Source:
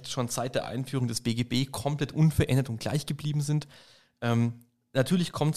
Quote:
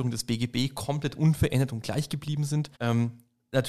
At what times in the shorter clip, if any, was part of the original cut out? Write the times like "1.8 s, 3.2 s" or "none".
2.7 s